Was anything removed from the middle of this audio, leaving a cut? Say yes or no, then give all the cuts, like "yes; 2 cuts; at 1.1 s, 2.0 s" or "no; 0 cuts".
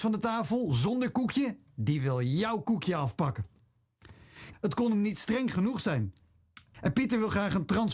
yes; 2 cuts; at 4.5 s, 6.7 s